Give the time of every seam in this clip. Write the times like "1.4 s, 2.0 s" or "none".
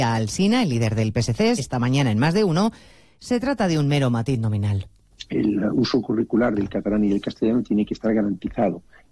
1.6 s